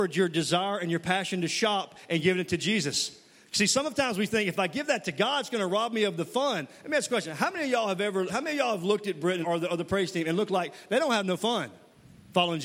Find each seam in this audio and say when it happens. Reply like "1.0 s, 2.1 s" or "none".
8.3 s, 9.4 s